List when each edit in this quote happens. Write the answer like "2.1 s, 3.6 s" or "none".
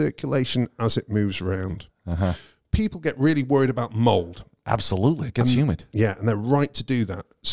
none